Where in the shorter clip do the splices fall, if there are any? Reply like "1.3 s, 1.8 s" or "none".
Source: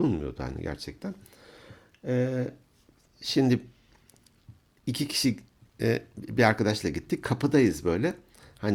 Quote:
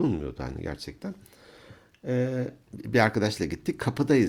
2.7 s